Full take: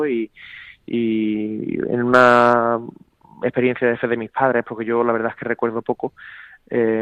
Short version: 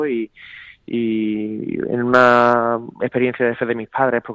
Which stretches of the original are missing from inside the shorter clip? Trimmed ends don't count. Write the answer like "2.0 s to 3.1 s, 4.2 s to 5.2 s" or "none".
2.9 s to 3.4 s